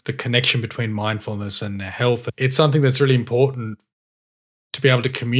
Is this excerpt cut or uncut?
uncut